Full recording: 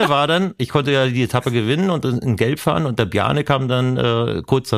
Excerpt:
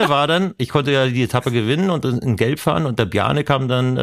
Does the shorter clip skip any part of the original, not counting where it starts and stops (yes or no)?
no